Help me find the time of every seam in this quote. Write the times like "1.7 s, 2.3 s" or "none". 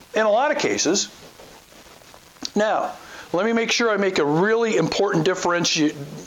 none